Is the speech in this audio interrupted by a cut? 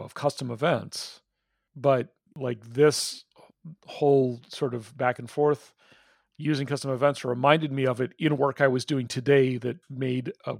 no; 0 cuts

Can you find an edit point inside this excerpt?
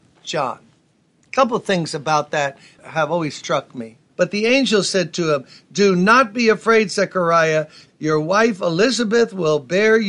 yes; 2 cuts; at 4.1 s, 7.9 s

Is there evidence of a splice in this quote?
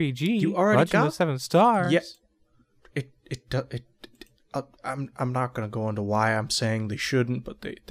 no; 0 cuts

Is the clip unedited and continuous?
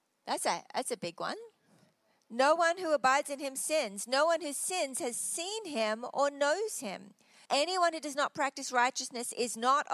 no; 1 cut; at 7.5 s

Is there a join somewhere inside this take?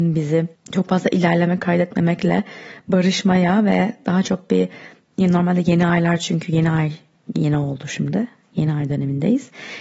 no; 0 cuts

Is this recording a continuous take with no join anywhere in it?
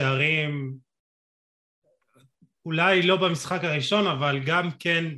yes; 0 cuts

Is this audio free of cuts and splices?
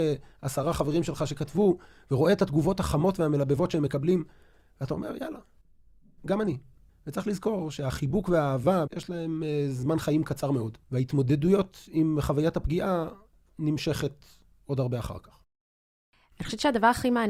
no; 2 cuts; at 8.9 s, 10.8 s

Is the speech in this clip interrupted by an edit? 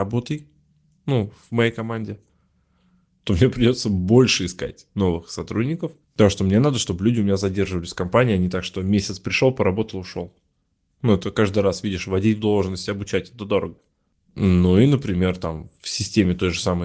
yes; 1 cut; at 6.0 s

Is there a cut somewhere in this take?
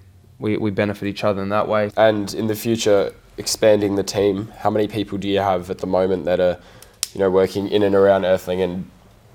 yes; 1 cut; at 1.9 s

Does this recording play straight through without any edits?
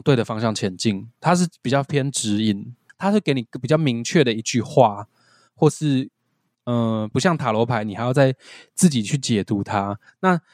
no; 2 cuts; at 2.9 s, 7.1 s

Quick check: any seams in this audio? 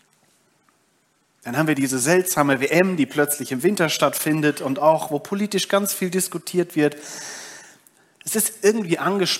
no; 0 cuts

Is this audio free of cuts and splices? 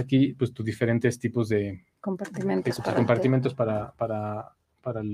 yes; 0 cuts

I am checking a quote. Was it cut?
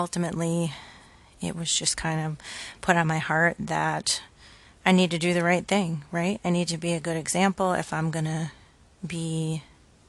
no; 0 cuts

